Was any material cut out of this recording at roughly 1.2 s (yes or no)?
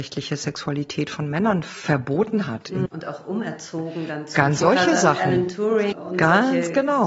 no